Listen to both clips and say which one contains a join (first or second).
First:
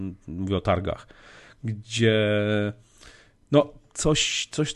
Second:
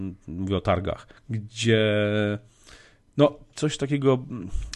second